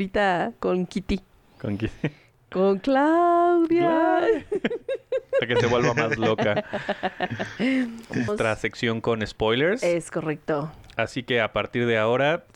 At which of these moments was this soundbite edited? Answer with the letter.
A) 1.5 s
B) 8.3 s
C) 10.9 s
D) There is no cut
B